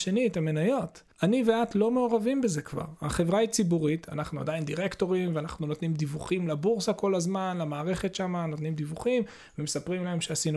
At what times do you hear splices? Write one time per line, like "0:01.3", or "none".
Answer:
0:01.1